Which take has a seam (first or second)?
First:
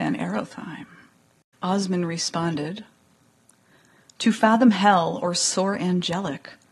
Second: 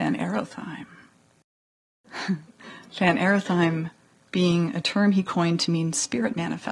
first